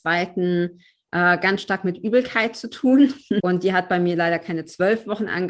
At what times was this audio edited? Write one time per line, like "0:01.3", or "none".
0:03.4